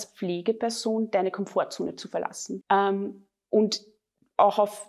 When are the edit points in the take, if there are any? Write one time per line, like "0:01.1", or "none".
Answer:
0:02.6

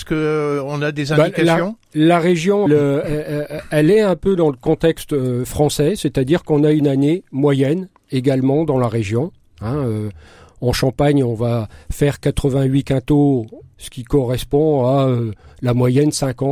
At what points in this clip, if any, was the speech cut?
0:02.7
0:13.7

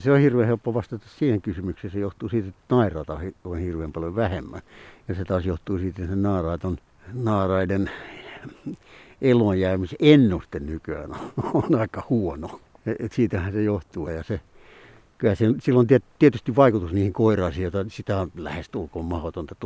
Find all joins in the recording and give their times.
0:14.0

